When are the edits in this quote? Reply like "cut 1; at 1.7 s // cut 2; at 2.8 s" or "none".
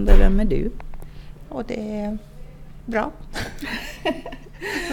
cut 1; at 1.5 s